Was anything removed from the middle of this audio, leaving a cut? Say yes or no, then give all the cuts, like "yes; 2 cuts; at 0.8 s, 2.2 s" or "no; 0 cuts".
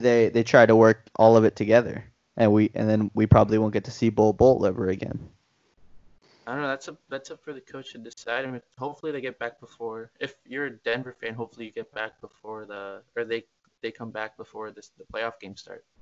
no; 0 cuts